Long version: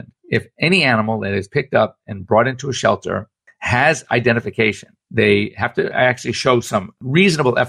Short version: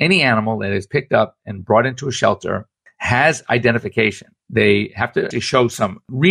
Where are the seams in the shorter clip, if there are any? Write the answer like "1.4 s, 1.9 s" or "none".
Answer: 5.3 s